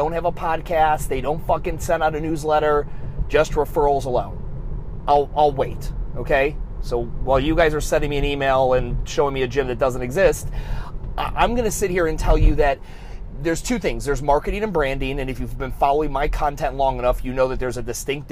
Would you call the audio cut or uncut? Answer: uncut